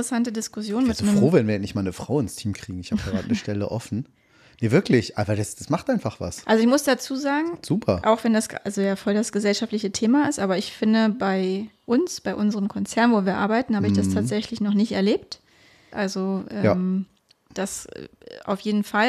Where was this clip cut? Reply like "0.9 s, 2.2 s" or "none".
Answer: 15.9 s